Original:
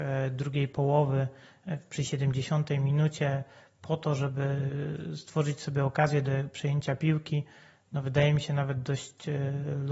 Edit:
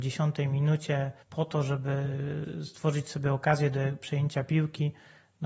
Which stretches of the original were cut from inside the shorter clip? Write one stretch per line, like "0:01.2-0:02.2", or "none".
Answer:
0:03.5-0:03.7